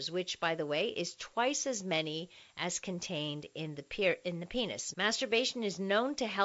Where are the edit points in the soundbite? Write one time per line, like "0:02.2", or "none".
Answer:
0:04.9